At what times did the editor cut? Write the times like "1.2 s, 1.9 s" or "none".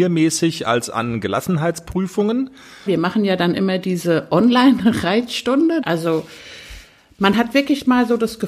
2.9 s, 5.8 s

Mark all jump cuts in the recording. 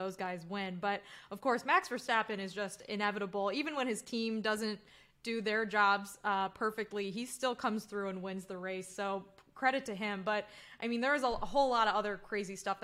none

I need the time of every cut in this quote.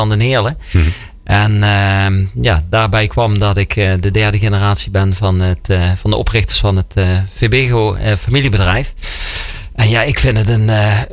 none

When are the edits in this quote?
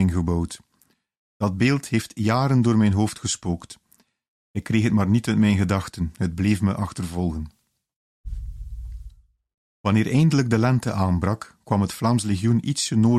1.2 s, 9.6 s

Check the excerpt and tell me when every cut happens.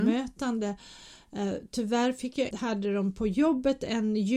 2.5 s

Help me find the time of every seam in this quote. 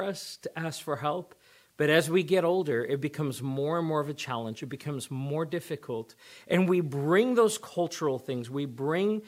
none

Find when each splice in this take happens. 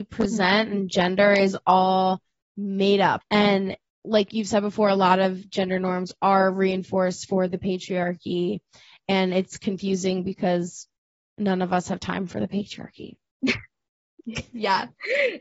3.2 s

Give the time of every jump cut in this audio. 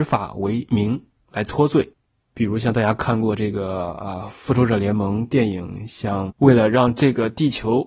2.2 s, 6.3 s

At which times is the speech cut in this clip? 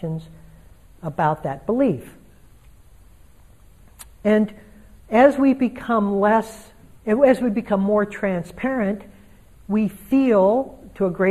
none

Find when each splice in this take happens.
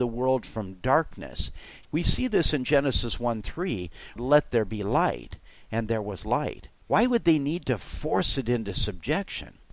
1.8 s, 4.2 s, 6.8 s

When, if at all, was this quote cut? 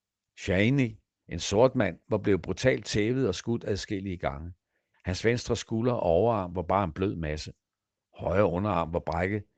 4.9 s

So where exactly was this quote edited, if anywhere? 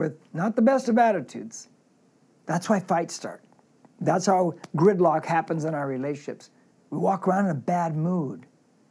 2.4 s, 6.7 s

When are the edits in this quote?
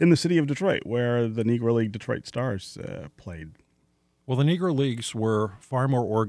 none

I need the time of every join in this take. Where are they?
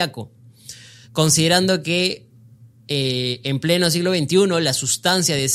none

